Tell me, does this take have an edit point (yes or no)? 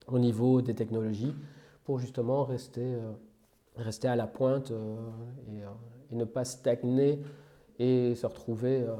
no